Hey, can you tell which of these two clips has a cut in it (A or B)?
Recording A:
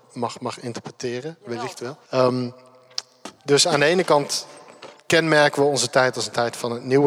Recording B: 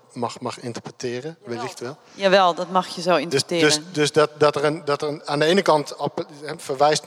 A